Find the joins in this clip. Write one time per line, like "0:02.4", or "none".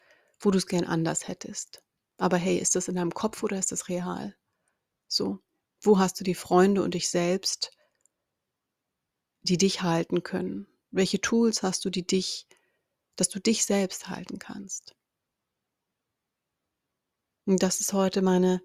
none

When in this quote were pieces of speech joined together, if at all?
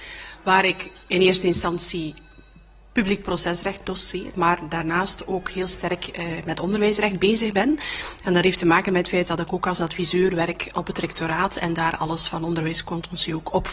0:04.3

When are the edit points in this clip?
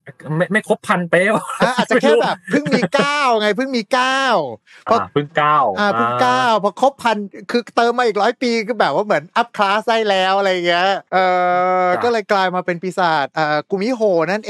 0:11.1

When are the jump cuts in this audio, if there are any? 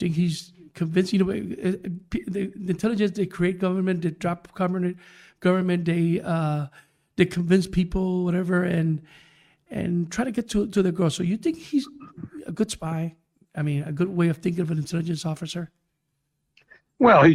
none

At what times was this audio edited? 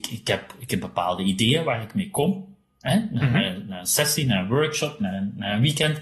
none

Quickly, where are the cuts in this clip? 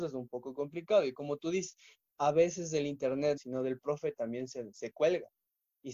0:03.4

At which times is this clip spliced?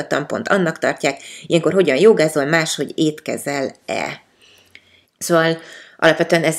0:05.1

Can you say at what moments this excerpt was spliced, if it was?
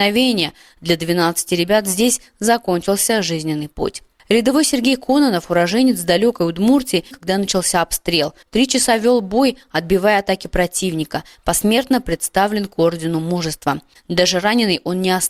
0:07.1
0:08.4
0:14.0

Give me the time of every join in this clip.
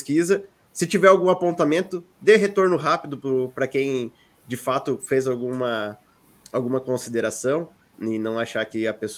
0:07.9

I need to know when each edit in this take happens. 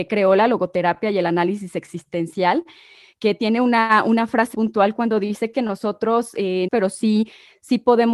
0:04.5
0:06.7

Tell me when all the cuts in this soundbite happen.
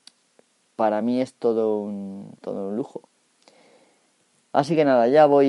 0:02.4

